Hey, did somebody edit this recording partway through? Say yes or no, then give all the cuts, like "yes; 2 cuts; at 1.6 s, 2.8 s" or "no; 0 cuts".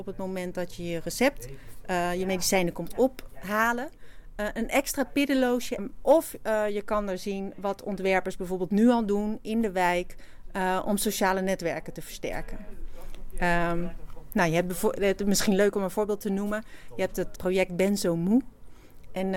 yes; 2 cuts; at 5.8 s, 17.4 s